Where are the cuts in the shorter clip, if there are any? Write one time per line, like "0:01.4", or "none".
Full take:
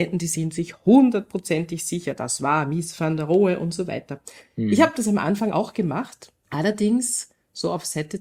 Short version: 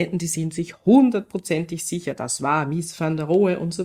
none